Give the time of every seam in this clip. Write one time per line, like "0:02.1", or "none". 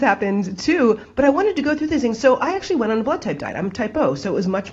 none